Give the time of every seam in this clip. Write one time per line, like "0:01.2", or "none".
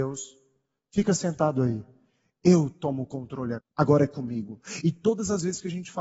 0:03.6